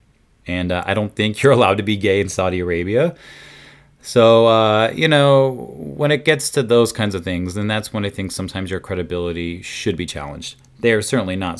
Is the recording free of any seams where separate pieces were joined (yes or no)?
yes